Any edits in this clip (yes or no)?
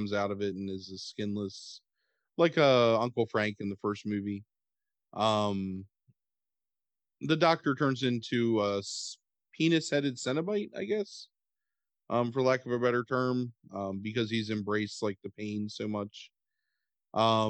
no